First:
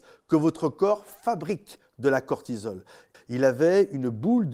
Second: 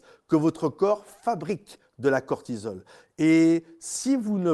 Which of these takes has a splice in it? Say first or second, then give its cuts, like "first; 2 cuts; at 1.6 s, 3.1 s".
first; 1 cut; at 3.1 s